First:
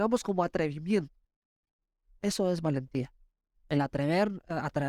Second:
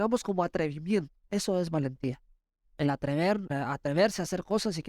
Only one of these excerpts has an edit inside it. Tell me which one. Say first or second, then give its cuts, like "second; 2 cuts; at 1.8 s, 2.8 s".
second; 2 cuts; at 1.2 s, 3.5 s